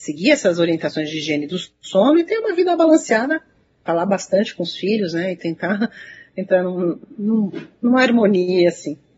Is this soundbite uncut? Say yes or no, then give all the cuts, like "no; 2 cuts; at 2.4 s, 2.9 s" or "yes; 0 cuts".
yes; 0 cuts